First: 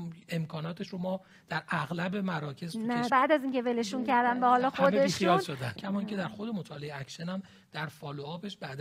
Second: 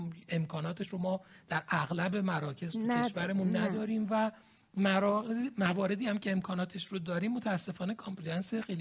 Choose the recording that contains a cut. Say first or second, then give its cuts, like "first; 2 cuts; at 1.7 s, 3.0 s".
first; 2 cuts; at 3.1 s, 5.8 s